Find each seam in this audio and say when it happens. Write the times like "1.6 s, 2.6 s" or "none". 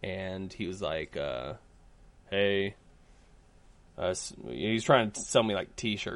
none